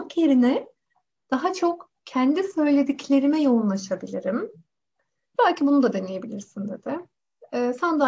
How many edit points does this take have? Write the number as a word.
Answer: one